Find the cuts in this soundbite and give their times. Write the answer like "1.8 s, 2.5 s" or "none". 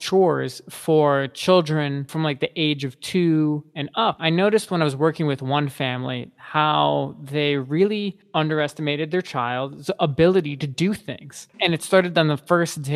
4.2 s, 11.5 s